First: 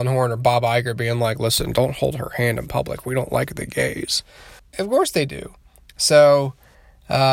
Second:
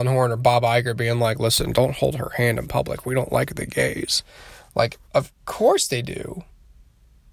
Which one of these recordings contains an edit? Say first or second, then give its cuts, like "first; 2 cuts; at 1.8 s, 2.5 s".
first; 1 cut; at 4.6 s